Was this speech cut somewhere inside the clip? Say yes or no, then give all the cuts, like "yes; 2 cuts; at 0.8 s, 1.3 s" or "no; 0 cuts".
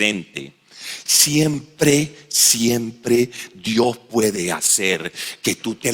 no; 0 cuts